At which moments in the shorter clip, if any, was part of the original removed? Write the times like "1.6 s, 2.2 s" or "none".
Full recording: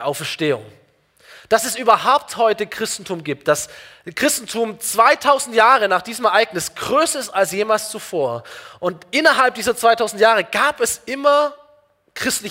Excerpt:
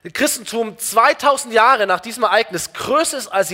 none